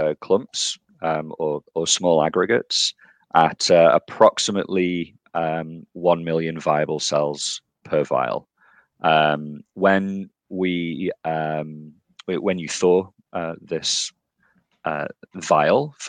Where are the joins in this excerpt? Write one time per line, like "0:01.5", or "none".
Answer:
none